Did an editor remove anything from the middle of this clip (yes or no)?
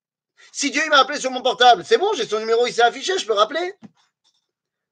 no